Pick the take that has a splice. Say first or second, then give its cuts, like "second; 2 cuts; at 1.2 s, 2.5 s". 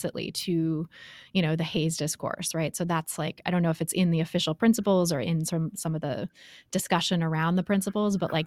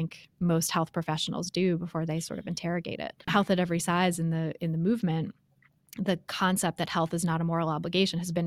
second; 1 cut; at 3.3 s